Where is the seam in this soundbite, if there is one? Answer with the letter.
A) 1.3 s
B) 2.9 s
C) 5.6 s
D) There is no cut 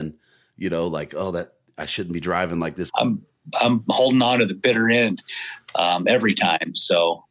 B